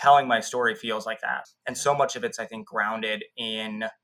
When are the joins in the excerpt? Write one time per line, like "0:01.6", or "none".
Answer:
0:01.4